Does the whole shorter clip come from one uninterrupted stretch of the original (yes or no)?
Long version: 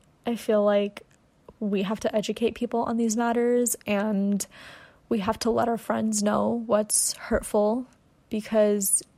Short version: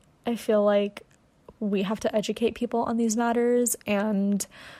yes